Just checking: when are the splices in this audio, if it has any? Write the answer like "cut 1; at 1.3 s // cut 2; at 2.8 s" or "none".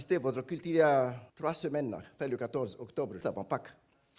cut 1; at 1.3 s // cut 2; at 3.2 s